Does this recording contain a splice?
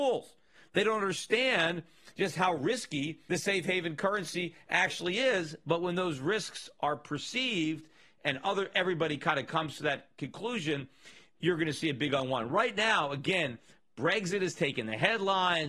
no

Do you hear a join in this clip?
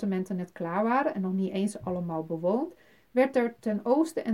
no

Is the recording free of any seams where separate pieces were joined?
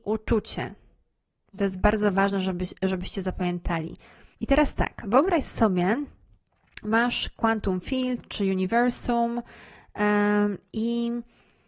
no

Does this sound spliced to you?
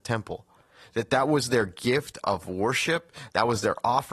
yes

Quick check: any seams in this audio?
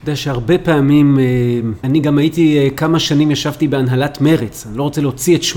yes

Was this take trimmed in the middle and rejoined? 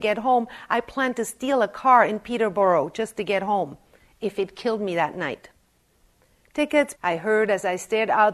yes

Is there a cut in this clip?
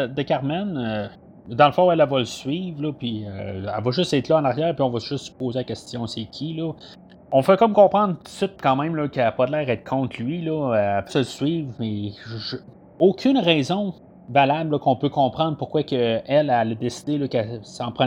yes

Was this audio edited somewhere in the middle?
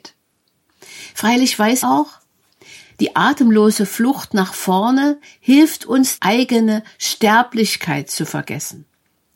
yes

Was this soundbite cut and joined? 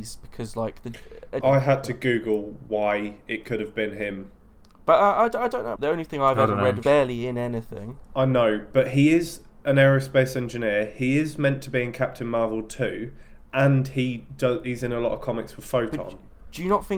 yes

